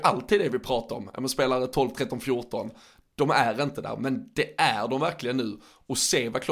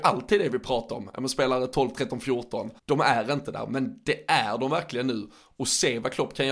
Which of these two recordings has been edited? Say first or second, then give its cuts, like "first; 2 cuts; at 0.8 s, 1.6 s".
second; 1 cut; at 2.8 s